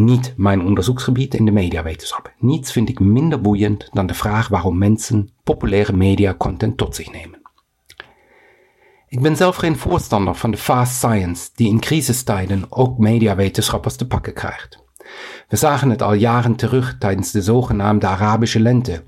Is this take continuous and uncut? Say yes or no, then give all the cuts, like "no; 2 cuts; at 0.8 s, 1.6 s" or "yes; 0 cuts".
yes; 0 cuts